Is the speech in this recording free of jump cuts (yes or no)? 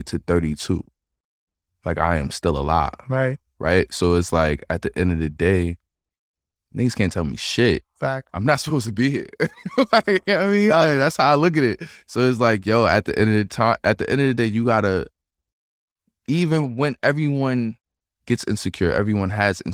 yes